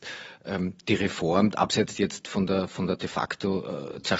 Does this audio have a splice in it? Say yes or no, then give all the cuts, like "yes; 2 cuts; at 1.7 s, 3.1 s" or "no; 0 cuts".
yes; 1 cut; at 1.5 s